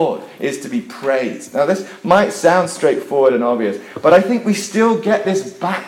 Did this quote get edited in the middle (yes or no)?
no